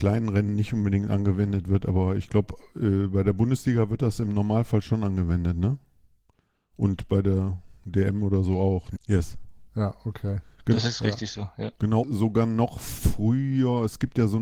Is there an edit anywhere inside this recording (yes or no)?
yes